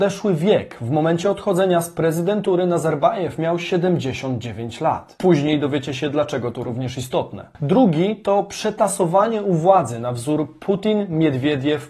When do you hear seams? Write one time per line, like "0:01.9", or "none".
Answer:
0:05.2